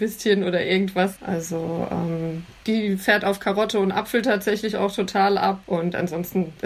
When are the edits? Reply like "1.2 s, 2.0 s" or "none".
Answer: 1.2 s, 2.6 s, 5.6 s

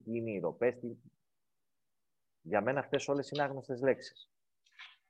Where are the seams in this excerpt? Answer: none

